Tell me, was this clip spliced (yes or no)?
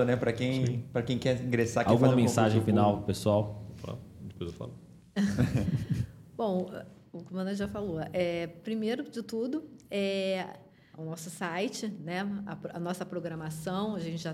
yes